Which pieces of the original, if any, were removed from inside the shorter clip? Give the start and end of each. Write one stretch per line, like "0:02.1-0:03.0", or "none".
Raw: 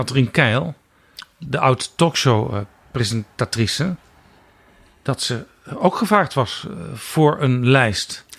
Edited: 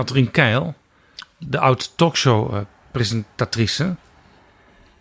none